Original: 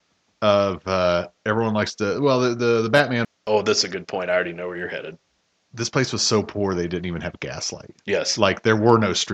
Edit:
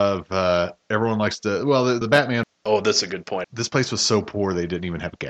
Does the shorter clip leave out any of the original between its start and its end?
yes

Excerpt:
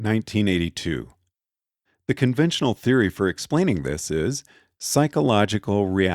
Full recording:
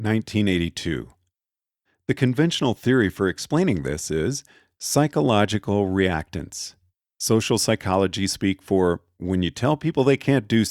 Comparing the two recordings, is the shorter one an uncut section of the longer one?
yes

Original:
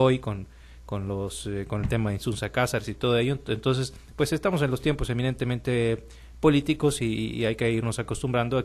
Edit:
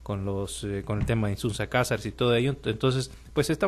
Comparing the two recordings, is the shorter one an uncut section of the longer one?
yes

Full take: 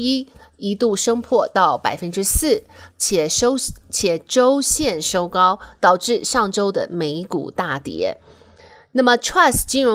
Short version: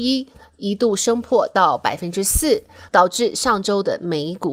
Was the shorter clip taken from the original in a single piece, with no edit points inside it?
no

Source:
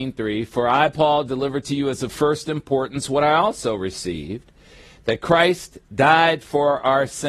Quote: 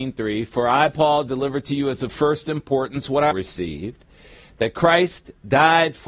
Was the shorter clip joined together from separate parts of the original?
yes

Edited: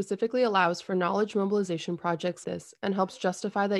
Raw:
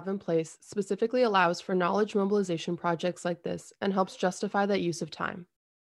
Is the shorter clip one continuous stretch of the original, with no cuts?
no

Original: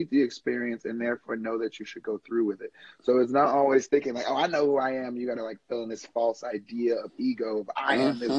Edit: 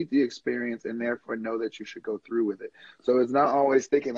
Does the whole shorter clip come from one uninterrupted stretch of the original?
yes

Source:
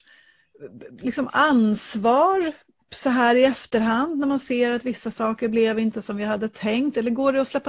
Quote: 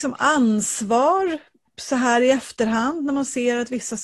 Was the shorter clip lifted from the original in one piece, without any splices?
yes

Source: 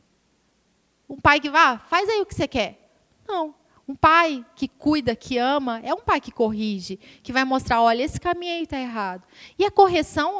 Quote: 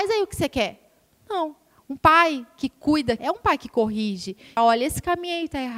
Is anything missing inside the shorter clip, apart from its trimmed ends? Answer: yes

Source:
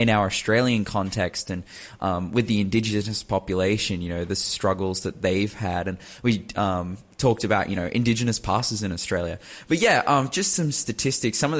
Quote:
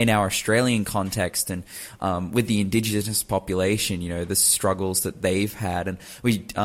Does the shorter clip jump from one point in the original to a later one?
no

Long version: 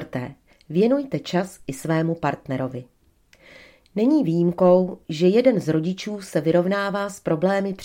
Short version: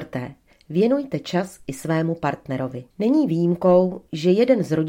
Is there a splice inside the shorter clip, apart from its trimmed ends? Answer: yes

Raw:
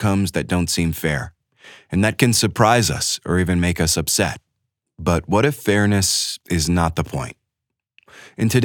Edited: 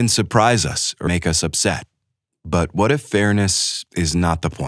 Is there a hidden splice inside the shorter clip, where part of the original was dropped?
yes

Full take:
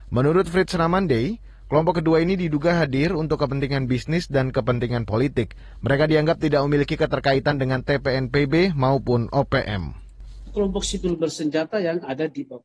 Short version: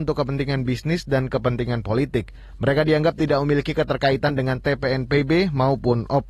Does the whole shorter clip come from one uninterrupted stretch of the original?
yes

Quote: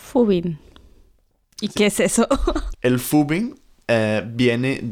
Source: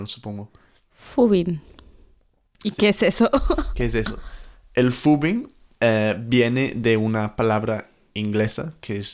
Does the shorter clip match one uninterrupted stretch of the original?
no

